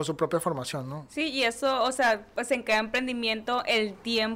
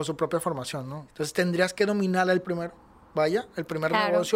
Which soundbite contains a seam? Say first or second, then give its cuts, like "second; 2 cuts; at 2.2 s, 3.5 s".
second; 2 cuts; at 1.1 s, 2.4 s